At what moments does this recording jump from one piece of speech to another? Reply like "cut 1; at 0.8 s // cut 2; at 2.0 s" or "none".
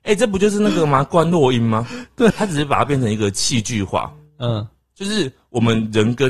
cut 1; at 2.3 s